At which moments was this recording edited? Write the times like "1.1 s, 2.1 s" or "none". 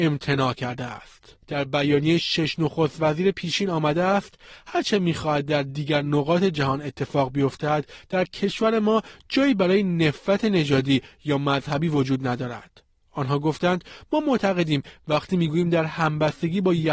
1.4 s